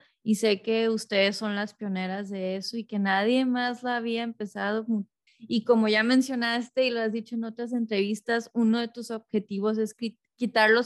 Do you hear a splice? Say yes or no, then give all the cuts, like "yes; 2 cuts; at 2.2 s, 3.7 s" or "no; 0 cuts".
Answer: yes; 1 cut; at 5.3 s